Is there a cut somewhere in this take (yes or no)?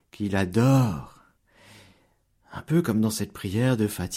no